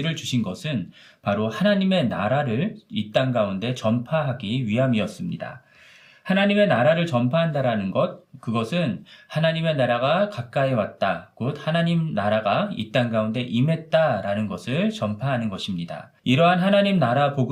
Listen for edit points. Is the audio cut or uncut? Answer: cut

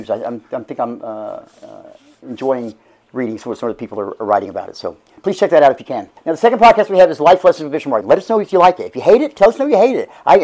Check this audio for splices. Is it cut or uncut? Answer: cut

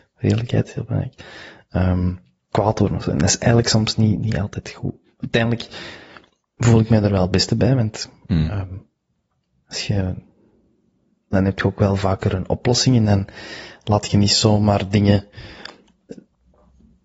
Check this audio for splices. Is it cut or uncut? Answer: cut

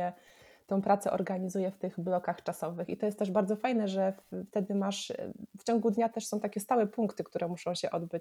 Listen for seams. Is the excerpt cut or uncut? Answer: uncut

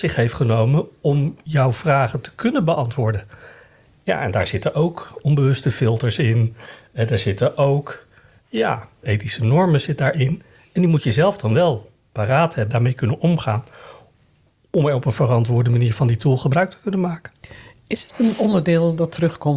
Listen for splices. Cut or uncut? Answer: cut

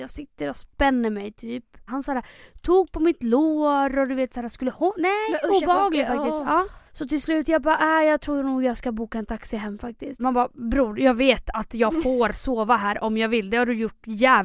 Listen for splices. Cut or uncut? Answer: cut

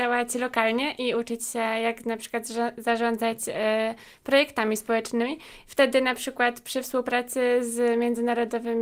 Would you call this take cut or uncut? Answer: uncut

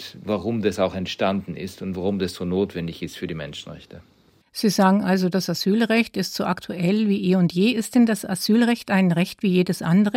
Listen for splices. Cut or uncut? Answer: uncut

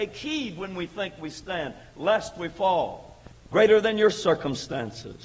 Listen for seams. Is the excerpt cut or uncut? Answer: cut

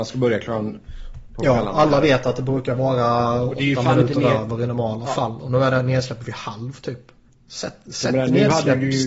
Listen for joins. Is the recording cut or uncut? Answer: cut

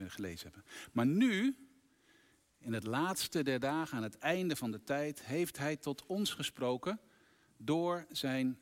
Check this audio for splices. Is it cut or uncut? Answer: uncut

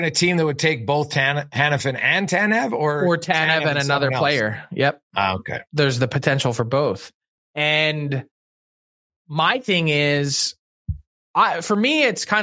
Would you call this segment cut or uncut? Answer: uncut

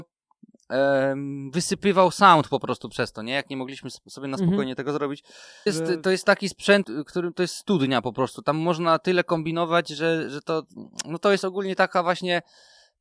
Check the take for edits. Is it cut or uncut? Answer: cut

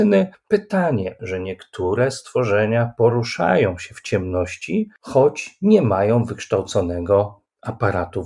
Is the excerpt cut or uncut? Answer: cut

